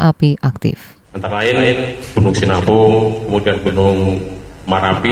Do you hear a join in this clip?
yes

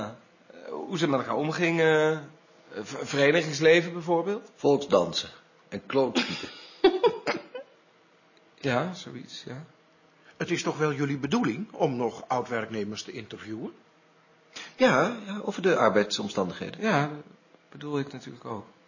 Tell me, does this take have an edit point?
no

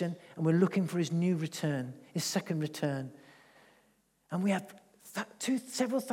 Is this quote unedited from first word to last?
yes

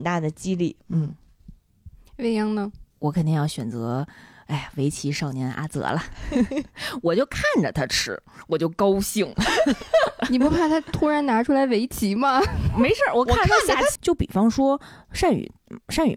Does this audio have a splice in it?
yes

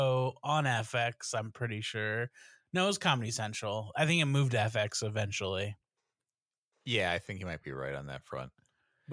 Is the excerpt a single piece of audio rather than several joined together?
yes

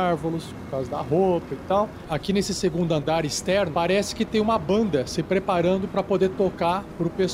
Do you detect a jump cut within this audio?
yes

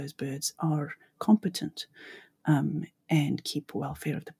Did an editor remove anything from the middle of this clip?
no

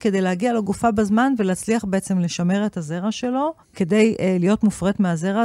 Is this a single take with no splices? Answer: no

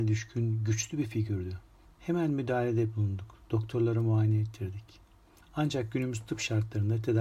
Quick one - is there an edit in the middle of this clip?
yes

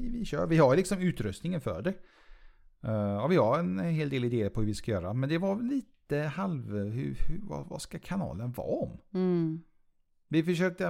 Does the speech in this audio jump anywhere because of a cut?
no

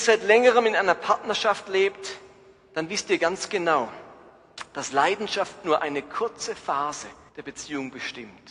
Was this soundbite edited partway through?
yes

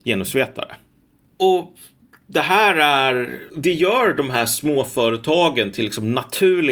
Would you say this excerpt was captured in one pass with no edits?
no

